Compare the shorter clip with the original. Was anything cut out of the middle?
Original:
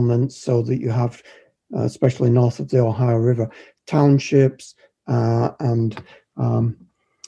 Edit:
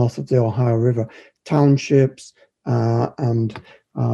no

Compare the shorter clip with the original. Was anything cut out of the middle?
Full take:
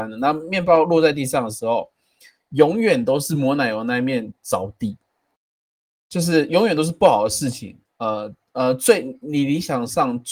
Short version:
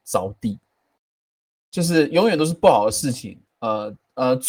no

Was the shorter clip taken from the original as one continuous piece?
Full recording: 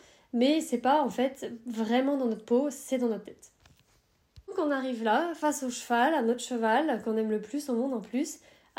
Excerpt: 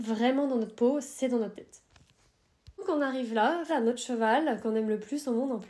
no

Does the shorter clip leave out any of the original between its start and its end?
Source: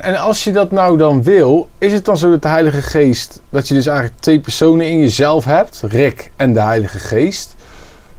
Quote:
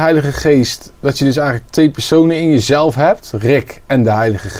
no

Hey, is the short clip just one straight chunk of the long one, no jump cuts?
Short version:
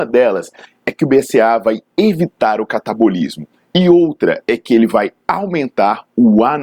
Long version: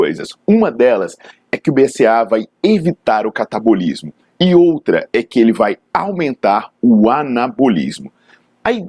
yes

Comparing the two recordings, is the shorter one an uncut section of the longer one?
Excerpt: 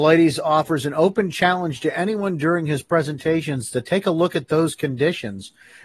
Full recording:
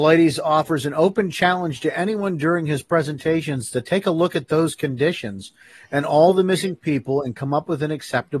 yes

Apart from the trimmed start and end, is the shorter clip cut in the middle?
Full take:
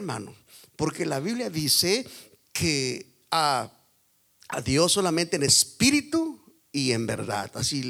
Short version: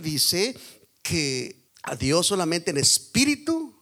yes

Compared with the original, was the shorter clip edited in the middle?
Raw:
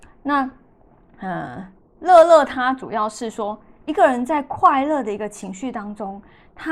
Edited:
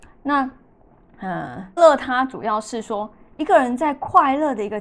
yes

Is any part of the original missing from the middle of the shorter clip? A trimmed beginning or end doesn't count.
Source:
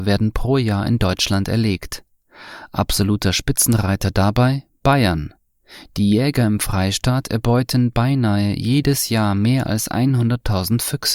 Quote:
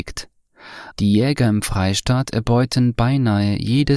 yes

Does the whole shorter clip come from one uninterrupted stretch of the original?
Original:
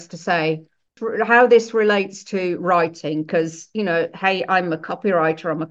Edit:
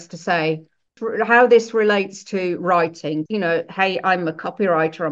no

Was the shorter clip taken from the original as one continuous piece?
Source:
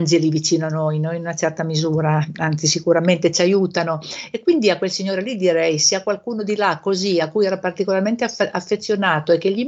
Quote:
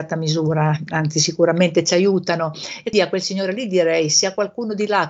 no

